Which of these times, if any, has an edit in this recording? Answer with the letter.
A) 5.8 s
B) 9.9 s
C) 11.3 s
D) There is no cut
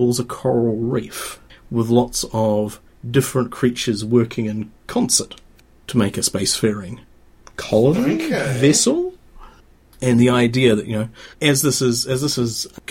C